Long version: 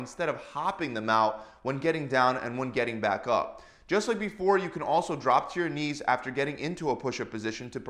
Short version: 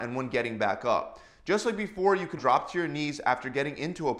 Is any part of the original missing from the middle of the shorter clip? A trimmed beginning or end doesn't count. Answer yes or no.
yes